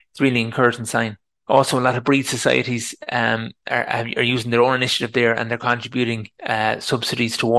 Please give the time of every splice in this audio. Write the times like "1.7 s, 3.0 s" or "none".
1.4 s